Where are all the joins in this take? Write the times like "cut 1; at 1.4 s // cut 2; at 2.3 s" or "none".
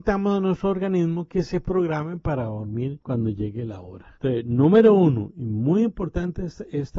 cut 1; at 4.2 s